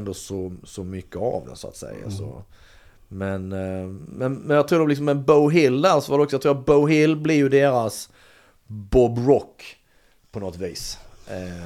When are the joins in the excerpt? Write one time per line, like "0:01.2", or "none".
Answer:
none